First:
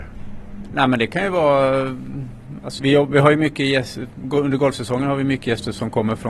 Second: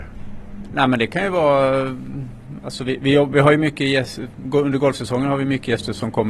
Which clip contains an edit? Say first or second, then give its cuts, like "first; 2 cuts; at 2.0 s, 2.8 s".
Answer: first; 1 cut; at 2.8 s